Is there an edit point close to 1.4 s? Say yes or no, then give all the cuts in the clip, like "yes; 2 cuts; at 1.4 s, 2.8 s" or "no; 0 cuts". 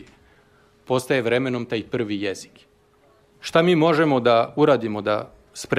no; 1 cut; at 3.3 s